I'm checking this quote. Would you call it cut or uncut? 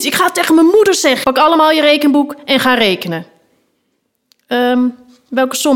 cut